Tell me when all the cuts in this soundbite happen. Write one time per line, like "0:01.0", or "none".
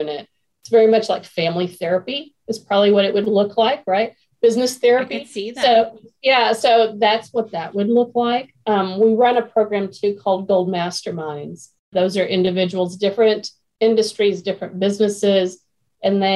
none